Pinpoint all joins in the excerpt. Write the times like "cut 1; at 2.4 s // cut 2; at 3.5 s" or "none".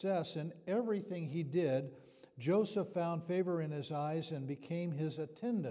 none